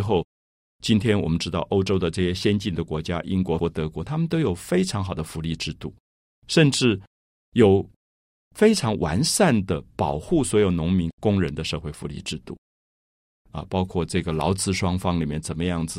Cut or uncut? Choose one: cut